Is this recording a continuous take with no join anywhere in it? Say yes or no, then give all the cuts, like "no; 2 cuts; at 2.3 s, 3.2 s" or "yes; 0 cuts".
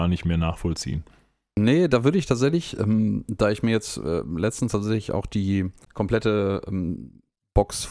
yes; 0 cuts